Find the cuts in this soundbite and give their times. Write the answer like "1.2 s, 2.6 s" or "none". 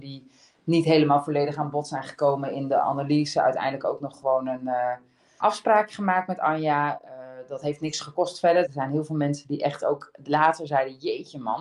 5.4 s, 8.6 s